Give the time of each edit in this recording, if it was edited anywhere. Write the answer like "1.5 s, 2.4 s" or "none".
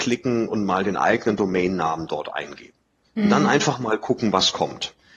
none